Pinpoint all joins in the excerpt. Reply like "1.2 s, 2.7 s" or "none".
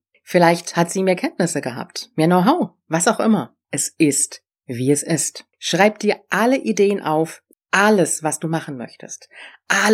3.6 s, 5.5 s, 7.5 s